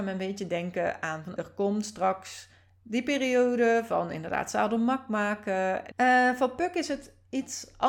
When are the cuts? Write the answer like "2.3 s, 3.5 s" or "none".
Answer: 1.4 s, 5.9 s